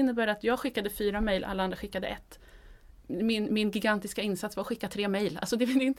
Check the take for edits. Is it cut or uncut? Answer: uncut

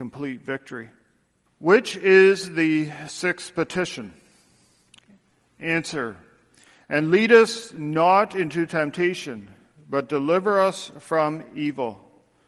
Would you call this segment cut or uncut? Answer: cut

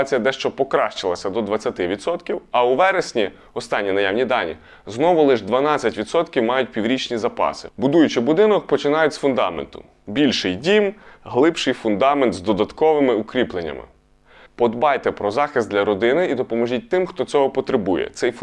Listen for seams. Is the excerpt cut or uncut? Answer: cut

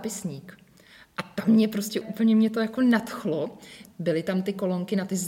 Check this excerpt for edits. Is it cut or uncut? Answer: cut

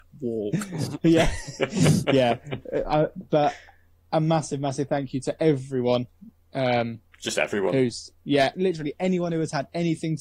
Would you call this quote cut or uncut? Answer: cut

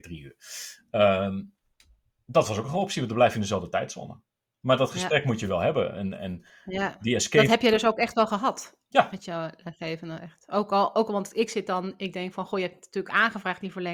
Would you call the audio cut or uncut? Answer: uncut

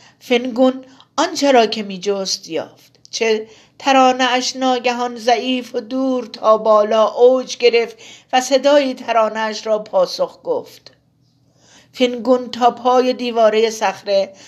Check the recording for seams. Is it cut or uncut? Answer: cut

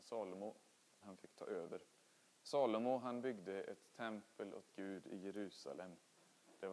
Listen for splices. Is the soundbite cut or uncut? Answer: cut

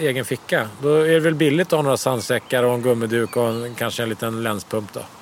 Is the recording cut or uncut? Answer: uncut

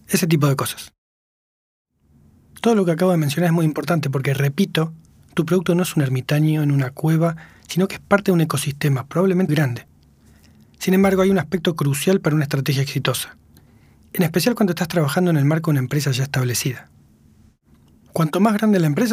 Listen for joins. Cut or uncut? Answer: cut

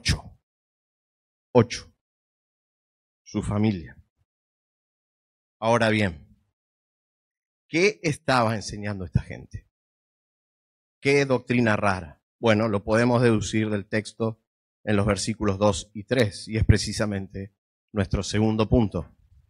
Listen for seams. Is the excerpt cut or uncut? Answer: uncut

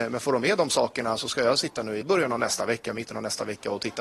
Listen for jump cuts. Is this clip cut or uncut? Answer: cut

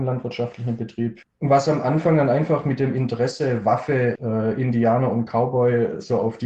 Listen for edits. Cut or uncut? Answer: cut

